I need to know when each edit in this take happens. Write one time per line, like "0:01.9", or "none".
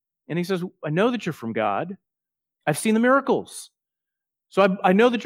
none